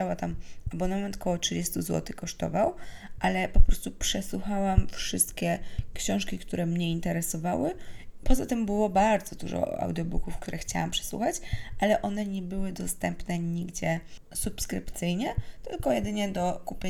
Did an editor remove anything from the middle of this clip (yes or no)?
yes